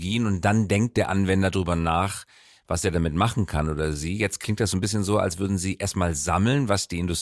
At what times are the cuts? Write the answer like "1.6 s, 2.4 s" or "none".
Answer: none

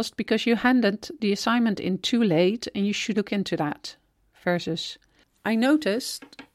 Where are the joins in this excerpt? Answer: 3.1 s

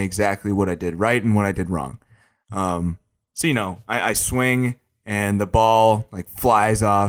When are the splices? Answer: none

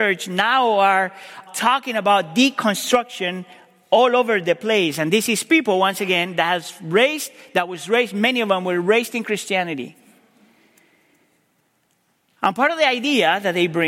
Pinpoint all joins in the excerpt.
1.5 s

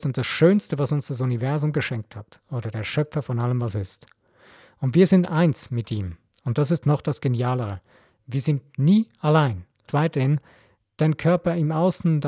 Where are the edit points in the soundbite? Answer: 9.9 s

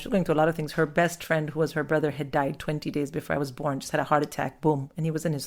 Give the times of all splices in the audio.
none

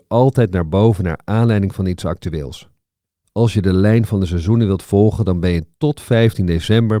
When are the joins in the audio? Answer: 3.2 s

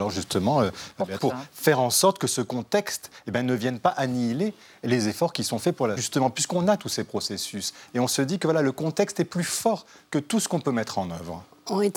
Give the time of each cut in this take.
1.2 s, 6.0 s

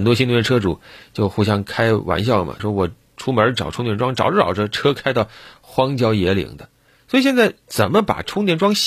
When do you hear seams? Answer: 2.6 s

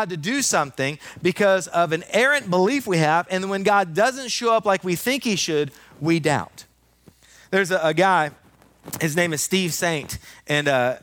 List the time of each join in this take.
none

